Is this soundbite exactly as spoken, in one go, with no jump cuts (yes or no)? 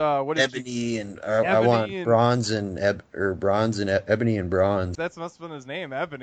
no